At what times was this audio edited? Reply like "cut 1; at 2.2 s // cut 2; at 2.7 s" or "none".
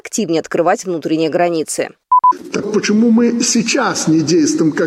cut 1; at 2.6 s